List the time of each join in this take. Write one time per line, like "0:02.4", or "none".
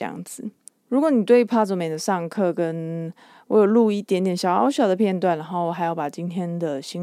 none